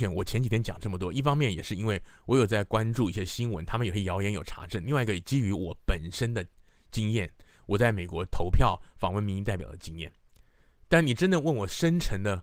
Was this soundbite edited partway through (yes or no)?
no